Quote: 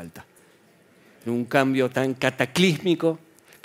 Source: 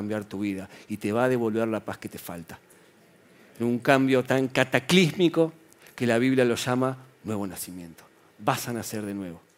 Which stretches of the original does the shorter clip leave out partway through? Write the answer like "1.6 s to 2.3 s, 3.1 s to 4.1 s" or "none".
none